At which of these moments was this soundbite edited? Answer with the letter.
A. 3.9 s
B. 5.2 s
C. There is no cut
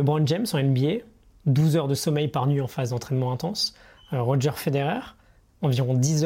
C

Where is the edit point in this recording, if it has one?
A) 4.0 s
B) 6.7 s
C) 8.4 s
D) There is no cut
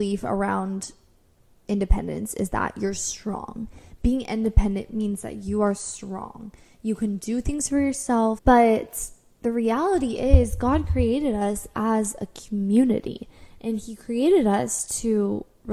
C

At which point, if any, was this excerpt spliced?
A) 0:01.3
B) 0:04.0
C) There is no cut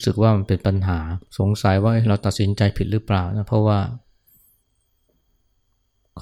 A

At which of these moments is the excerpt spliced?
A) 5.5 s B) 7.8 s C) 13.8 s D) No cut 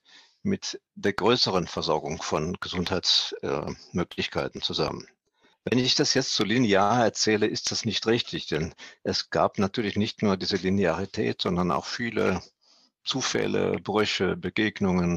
B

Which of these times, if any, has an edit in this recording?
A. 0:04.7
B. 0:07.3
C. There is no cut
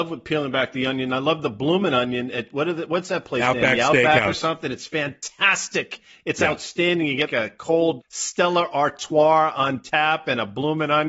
B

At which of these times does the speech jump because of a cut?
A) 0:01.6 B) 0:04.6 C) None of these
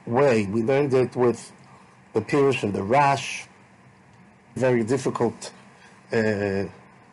B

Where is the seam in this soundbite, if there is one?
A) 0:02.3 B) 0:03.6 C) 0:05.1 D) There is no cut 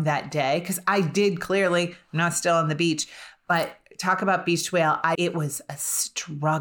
C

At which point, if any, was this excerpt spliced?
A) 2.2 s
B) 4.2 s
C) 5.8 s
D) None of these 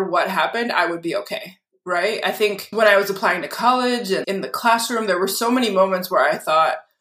B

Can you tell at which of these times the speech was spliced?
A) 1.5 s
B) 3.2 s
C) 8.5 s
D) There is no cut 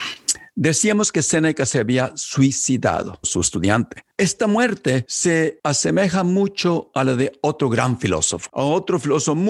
B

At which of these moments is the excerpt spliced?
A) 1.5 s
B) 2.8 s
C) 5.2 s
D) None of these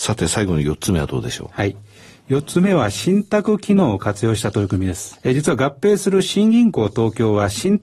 C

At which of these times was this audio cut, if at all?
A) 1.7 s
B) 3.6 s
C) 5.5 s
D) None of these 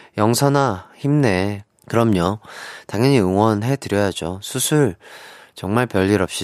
A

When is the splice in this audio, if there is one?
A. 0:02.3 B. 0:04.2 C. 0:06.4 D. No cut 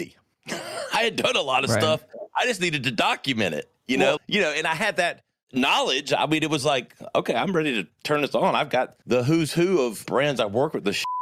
B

